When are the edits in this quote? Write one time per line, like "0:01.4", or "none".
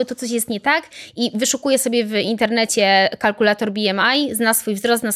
none